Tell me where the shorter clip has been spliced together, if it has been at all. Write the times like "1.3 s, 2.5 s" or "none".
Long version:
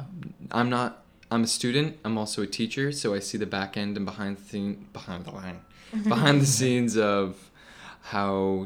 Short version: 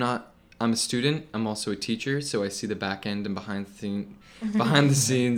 4.2 s

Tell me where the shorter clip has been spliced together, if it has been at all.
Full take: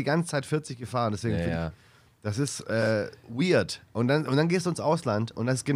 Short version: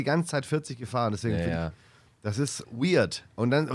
2.6 s

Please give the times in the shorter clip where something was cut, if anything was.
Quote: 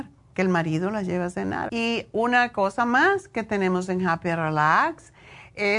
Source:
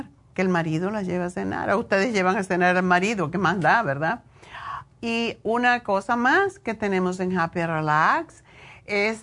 1.7 s

